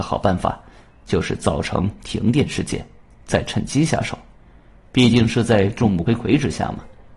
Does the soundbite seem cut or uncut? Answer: cut